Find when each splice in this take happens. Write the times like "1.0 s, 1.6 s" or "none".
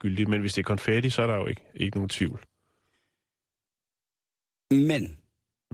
none